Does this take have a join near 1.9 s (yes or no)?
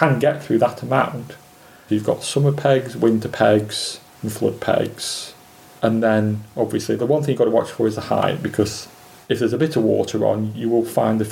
yes